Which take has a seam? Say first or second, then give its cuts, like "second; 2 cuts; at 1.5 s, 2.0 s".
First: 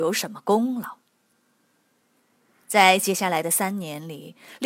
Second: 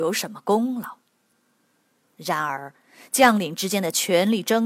second; 1 cut; at 2.0 s